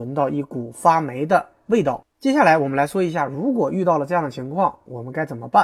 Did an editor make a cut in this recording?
no; 0 cuts

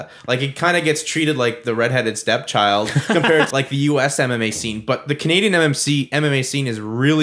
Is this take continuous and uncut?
no; 1 cut; at 3.5 s

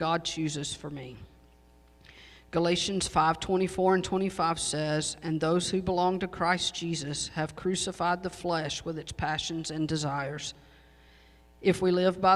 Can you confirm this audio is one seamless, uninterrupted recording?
yes; 0 cuts

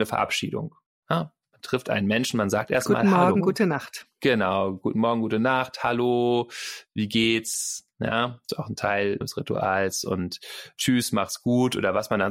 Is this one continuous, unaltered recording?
no; 1 cut; at 9.2 s

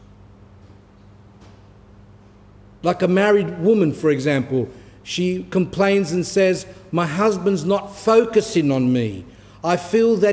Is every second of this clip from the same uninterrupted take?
yes; 0 cuts

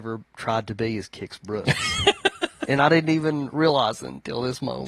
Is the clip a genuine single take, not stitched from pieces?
yes; 0 cuts

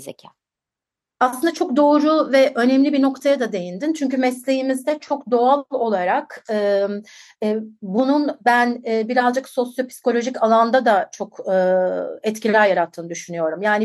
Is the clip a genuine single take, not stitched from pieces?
yes; 0 cuts

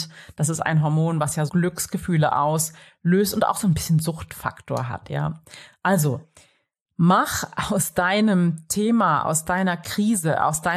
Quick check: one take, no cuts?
no; 1 cut; at 1.5 s

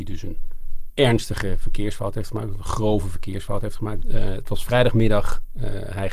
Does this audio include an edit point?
yes; 1 cut; at 4.0 s

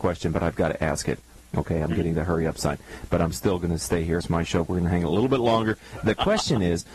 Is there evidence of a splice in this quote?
no; 0 cuts

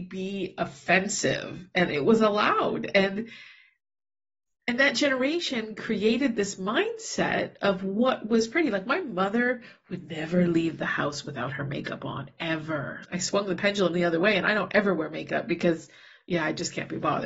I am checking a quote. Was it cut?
yes; 1 cut; at 13.0 s

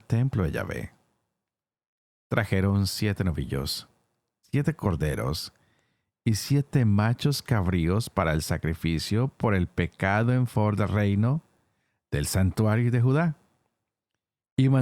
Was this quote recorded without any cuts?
no; 1 cut; at 4.4 s

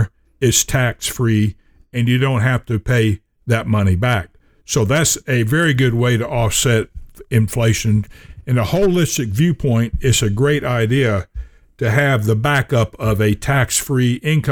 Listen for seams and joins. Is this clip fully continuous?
yes; 0 cuts

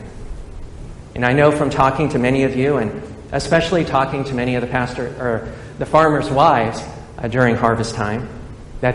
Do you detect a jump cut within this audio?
yes; 1 cut; at 1.1 s

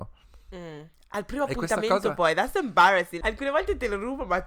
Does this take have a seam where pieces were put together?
yes; 1 cut; at 3.2 s

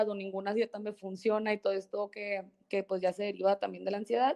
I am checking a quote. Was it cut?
no; 0 cuts

